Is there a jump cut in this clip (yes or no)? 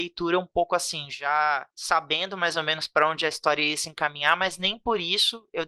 no